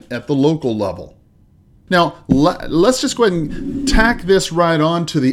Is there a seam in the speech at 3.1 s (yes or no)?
no